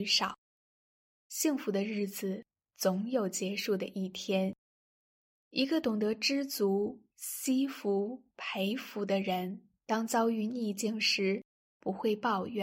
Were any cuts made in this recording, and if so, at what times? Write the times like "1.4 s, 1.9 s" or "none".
9.7 s